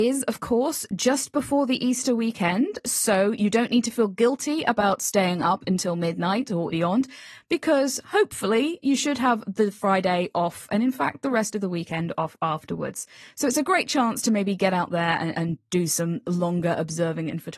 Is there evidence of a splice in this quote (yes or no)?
yes